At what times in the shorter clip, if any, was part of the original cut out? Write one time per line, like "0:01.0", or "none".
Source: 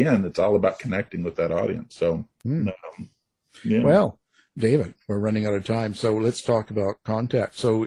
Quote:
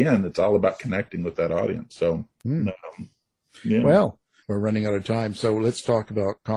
0:04.4